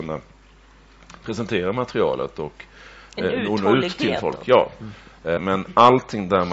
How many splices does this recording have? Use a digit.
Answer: 1